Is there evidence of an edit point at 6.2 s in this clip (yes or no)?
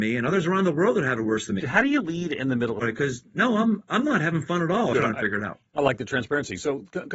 no